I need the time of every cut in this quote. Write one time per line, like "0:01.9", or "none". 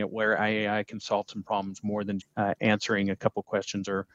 0:02.2